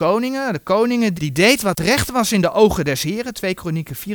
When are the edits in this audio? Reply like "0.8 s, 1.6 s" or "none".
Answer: 1.2 s